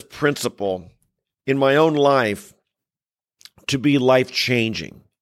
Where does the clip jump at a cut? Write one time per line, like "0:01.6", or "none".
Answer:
none